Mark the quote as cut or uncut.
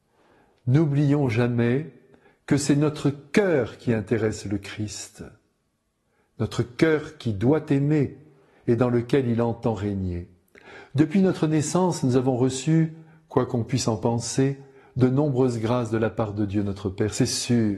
uncut